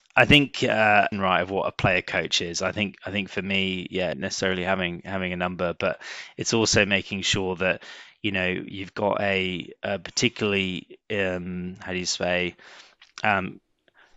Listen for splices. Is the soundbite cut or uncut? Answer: cut